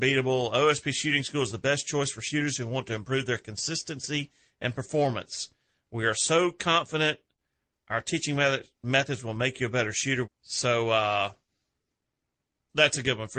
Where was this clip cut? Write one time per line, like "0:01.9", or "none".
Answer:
0:10.2